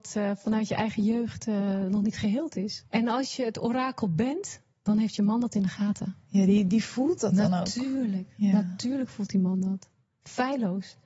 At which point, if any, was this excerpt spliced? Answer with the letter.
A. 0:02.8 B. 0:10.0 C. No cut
A